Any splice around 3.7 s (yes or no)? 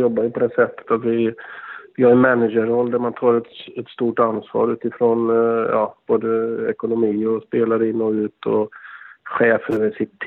no